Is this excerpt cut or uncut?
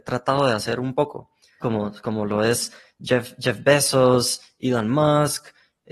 cut